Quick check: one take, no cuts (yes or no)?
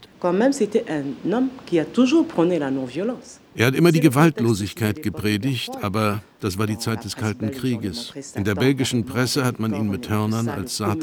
yes